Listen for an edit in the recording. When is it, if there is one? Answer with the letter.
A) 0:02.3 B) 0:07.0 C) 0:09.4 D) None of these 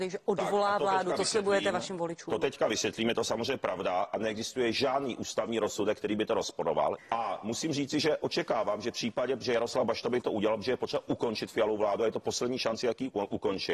B